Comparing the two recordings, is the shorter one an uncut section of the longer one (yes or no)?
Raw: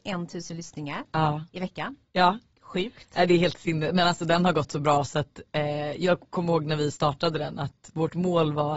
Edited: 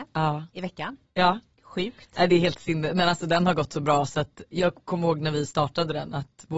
no